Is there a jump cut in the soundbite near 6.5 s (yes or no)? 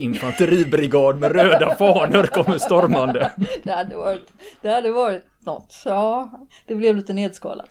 yes